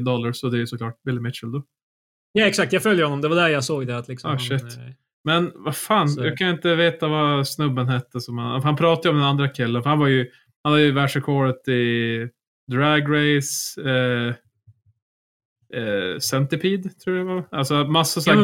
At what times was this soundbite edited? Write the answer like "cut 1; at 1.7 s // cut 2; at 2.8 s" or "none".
none